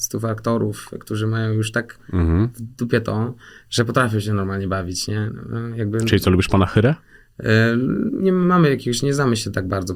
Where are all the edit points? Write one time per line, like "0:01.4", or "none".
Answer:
0:08.2